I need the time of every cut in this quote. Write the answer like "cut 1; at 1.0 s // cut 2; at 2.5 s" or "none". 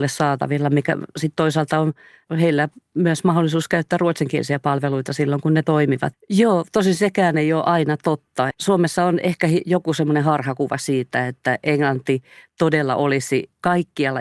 cut 1; at 6.1 s // cut 2; at 8.5 s